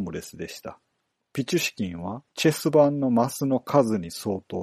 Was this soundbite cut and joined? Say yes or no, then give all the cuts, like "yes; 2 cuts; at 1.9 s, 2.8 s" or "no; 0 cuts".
yes; 2 cuts; at 1.1 s, 2.3 s